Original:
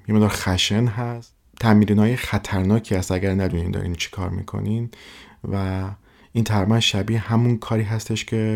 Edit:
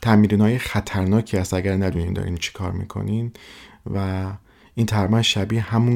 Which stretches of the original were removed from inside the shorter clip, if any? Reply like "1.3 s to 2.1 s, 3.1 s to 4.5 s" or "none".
none